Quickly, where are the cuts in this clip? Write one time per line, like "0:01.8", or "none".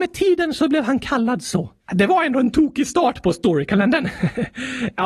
0:01.8